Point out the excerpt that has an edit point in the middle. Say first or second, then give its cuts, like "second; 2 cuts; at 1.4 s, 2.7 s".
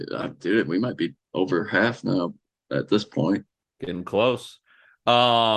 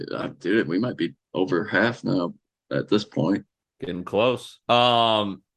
second; 1 cut; at 4.6 s